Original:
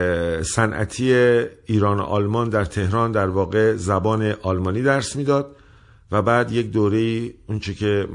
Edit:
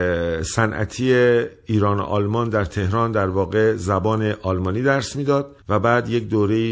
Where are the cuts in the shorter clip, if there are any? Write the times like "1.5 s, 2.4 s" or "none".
5.6 s